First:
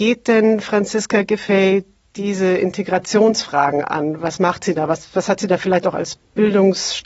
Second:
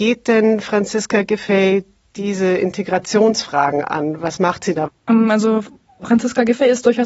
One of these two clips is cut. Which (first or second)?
second